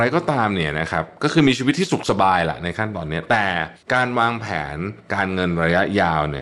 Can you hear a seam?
yes; 1 cut; at 3.8 s

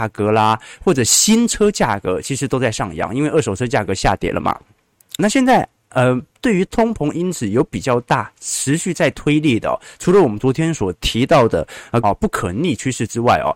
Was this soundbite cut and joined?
yes; 2 cuts; at 5.2 s, 12.0 s

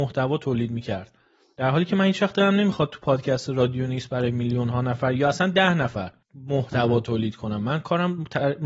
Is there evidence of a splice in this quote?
yes; 1 cut; at 6.2 s

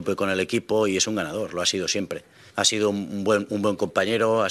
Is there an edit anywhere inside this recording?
yes; 1 cut; at 2.5 s

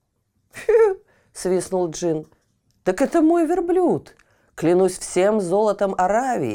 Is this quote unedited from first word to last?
yes; 0 cuts

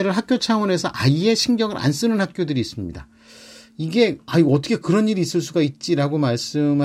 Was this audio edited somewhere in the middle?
no; 0 cuts

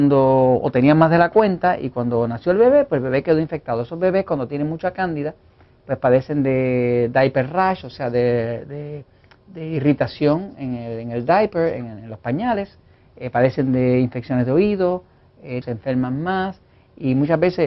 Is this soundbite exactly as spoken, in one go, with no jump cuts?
no; 1 cut; at 15.6 s

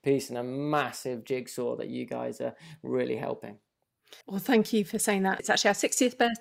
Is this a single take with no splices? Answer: no; 2 cuts; at 4.2 s, 5.4 s

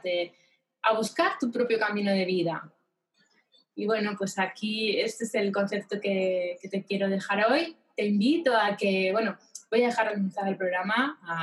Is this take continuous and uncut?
yes; 0 cuts

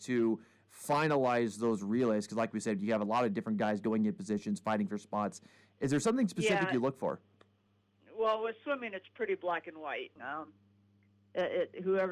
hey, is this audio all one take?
no; 1 cut; at 10.2 s

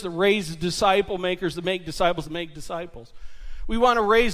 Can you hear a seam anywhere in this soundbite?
yes; 1 cut; at 2.2 s

